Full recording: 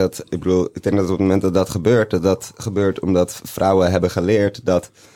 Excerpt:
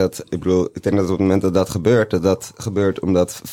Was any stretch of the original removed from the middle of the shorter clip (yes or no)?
no